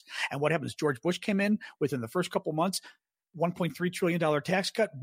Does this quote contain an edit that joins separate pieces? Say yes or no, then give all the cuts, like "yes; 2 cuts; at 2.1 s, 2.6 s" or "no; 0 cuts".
no; 0 cuts